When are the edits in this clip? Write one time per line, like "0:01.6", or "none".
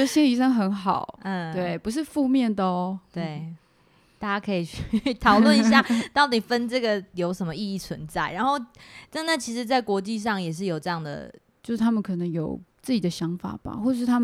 0:11.6
0:12.7